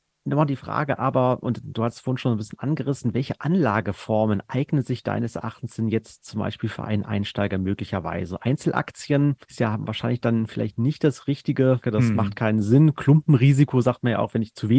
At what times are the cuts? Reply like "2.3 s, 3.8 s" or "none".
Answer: 9.4 s, 11.8 s